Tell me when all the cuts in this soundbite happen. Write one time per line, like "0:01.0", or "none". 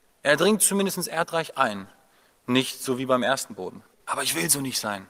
0:04.0